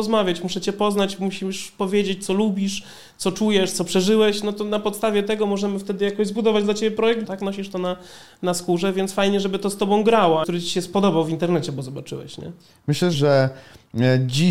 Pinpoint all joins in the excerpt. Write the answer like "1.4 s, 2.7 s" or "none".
7.2 s, 10.4 s, 13.1 s